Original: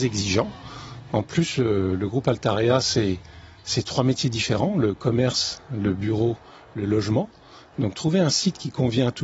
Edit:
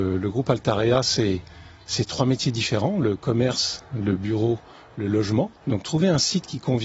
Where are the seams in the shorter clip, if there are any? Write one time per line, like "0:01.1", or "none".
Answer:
0:05.6